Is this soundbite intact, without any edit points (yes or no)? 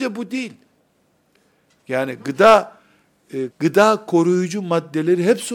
no